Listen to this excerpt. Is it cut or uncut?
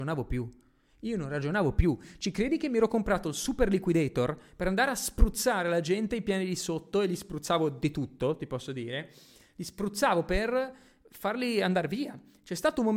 uncut